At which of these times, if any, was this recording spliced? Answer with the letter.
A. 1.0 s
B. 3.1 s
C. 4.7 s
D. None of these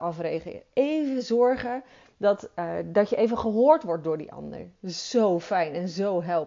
D